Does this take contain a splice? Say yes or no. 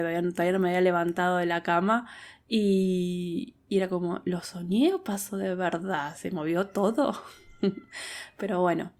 no